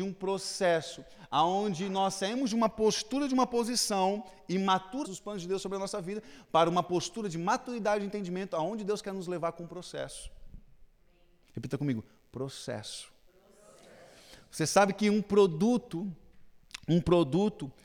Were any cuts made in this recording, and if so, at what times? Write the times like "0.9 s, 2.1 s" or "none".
5.0 s, 11.4 s

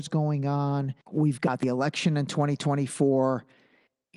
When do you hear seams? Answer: 1.0 s

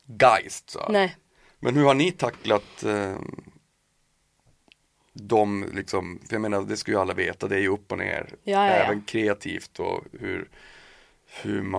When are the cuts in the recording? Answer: none

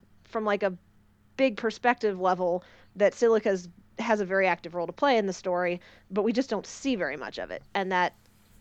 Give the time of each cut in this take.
none

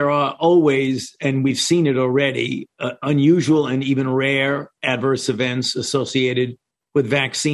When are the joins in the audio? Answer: none

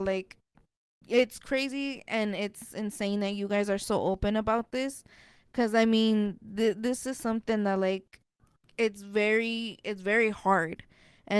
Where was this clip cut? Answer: none

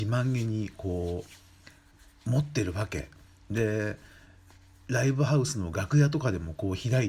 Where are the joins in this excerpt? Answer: none

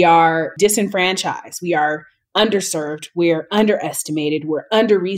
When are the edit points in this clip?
none

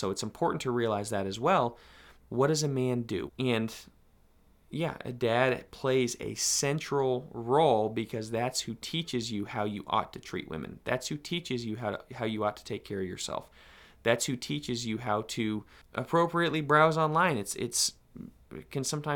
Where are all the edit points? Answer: 2.2 s, 3.3 s

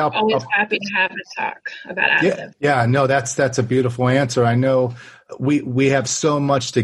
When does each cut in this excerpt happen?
2.5 s

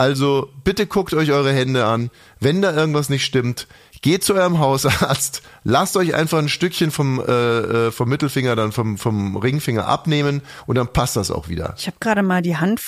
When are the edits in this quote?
none

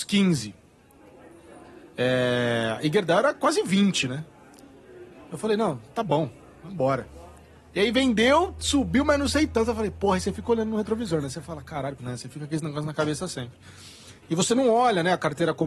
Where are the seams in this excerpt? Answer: 12.0 s

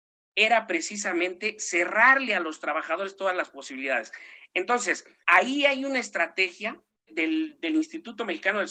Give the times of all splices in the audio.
5.2 s, 7.1 s

